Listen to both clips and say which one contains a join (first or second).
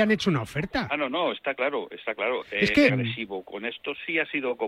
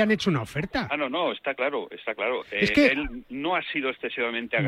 first